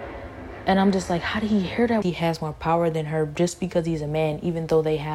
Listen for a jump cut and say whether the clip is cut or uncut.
cut